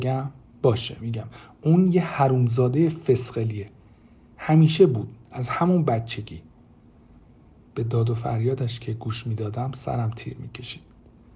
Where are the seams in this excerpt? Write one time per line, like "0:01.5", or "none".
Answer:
none